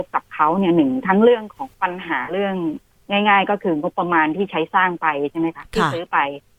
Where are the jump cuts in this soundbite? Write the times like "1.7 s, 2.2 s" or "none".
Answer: 1.7 s